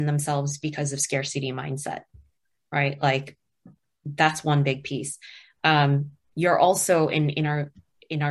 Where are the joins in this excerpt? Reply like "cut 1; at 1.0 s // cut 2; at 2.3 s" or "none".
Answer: none